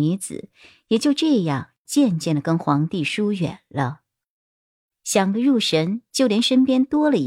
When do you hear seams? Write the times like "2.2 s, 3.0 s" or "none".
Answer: none